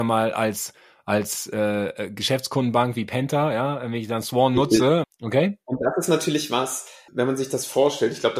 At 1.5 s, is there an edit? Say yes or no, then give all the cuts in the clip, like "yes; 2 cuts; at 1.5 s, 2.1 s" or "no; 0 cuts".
no; 2 cuts; at 5.0 s, 7.1 s